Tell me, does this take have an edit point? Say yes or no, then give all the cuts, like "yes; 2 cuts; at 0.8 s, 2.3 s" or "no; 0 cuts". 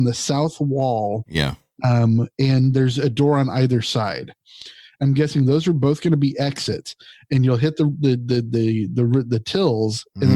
no; 0 cuts